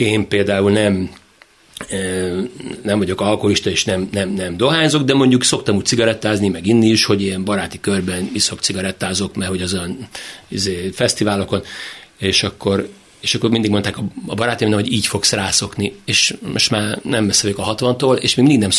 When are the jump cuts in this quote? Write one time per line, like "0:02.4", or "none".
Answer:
none